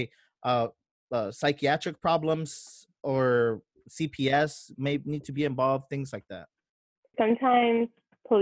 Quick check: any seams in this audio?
yes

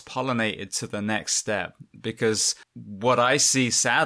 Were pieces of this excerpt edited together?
yes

